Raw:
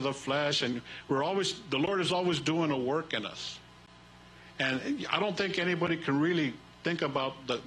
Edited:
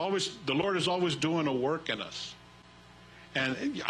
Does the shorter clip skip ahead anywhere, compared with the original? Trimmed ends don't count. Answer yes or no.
no